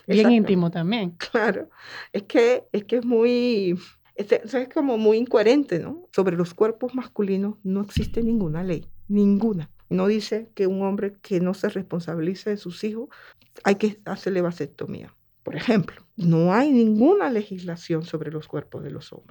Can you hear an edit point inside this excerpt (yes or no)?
yes